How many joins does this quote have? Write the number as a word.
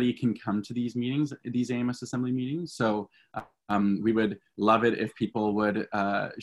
zero